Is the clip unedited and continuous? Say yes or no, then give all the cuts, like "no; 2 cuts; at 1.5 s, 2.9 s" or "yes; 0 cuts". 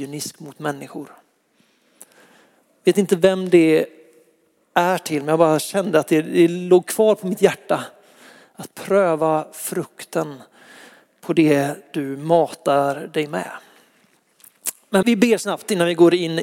no; 1 cut; at 15.0 s